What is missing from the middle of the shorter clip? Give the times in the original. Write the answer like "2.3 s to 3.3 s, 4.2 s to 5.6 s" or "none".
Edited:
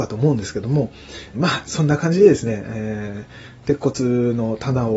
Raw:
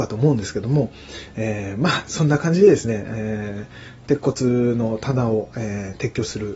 1.3 s to 1.7 s